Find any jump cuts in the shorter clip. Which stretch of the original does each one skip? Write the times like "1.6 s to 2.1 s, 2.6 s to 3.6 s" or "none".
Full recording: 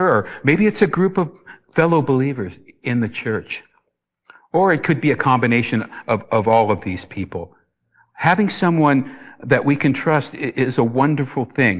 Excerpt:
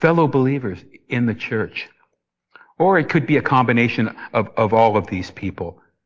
none